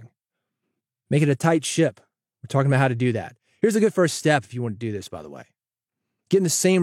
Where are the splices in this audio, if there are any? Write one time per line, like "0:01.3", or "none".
none

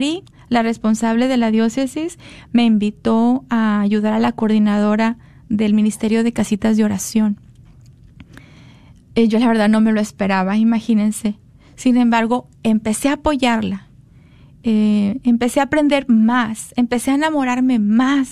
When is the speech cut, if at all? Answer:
none

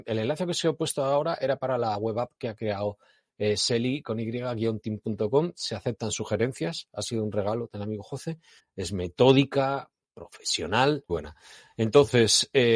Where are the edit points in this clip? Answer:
0:08.6
0:11.1

